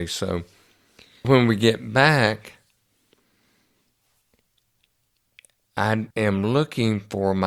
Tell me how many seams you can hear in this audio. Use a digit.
2